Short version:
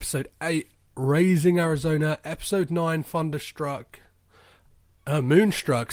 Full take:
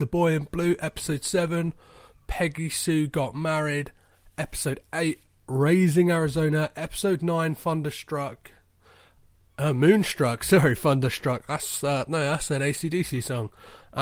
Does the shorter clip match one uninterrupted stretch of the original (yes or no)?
yes